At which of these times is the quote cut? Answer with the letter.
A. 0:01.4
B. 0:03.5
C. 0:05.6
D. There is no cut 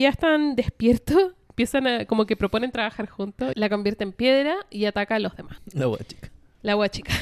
B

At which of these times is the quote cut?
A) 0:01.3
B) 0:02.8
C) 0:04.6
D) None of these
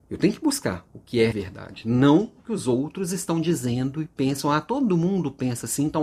A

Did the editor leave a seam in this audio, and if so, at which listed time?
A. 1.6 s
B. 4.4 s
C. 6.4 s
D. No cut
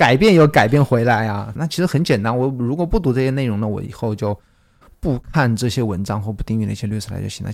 A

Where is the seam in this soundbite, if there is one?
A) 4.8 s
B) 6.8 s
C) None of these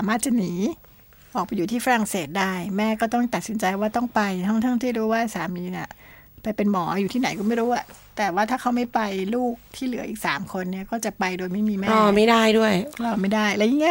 C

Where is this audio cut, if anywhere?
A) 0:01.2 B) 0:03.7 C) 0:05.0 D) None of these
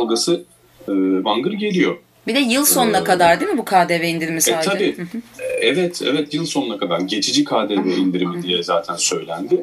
A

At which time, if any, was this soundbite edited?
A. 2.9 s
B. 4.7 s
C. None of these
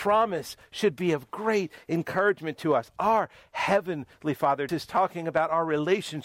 B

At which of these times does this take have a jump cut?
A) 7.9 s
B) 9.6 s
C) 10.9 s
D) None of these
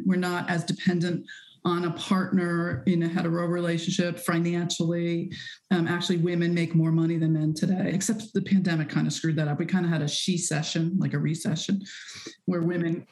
A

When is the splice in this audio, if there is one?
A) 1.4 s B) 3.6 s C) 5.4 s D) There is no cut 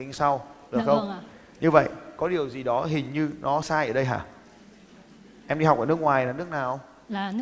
B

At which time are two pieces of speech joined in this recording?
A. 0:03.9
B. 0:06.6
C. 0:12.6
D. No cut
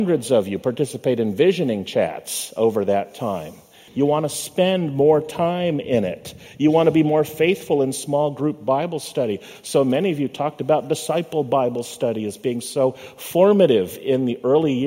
A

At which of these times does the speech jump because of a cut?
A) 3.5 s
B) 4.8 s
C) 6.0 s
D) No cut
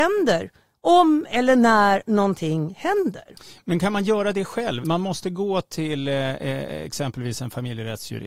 B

